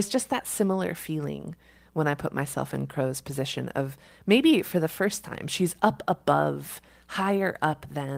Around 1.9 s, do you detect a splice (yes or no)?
no